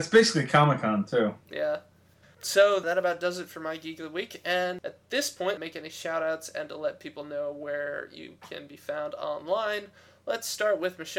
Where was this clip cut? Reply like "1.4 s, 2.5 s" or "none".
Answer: 2.2 s, 5.6 s